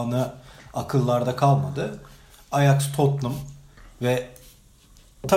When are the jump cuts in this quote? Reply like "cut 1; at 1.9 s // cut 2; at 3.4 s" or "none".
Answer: none